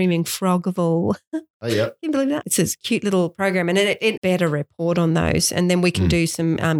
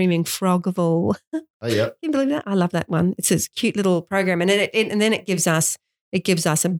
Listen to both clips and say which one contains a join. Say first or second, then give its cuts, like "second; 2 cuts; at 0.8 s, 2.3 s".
first; 2 cuts; at 2.4 s, 4.2 s